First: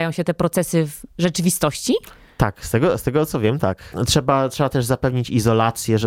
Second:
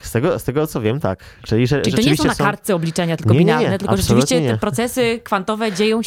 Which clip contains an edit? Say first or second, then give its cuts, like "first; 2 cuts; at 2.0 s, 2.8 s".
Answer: first; 1 cut; at 3.9 s